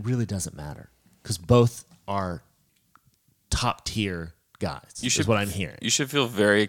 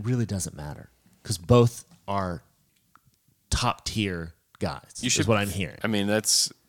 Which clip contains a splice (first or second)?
second